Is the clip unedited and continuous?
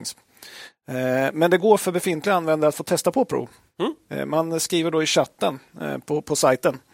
yes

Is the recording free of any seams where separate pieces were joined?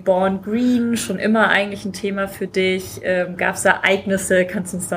yes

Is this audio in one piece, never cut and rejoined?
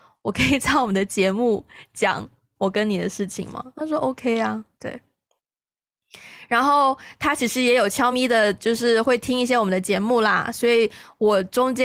no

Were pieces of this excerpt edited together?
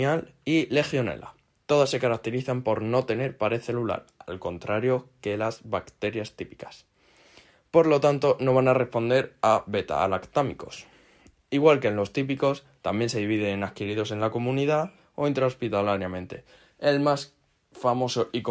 no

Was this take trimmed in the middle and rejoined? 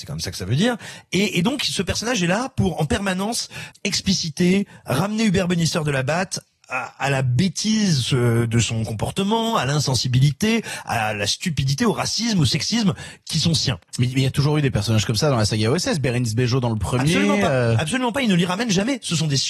yes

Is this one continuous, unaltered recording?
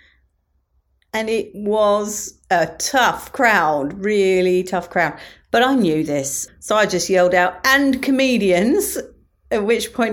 no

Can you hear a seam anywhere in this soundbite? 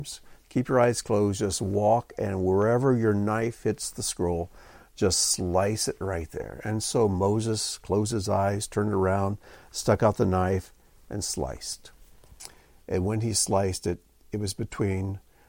no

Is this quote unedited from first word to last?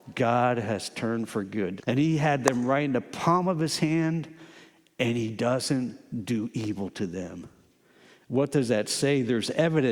no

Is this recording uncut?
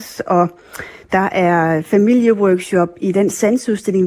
yes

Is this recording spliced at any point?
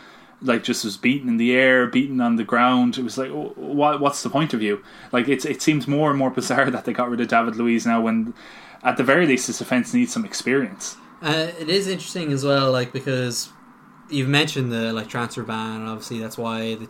no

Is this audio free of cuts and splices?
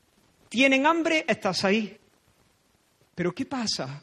no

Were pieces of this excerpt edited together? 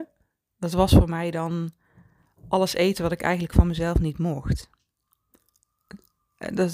no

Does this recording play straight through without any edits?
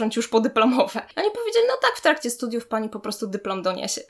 yes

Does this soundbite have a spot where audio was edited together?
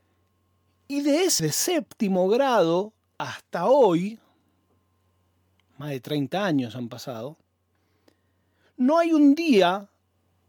yes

